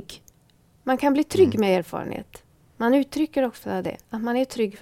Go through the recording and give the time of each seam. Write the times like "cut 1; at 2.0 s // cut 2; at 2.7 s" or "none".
none